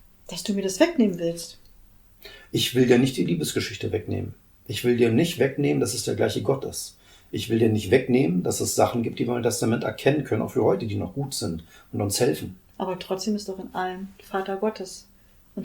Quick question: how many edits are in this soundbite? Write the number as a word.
one